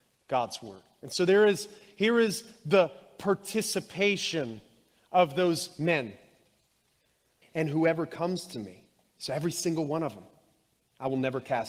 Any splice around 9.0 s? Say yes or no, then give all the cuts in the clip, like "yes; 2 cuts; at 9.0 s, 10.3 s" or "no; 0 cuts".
no; 1 cut; at 7.4 s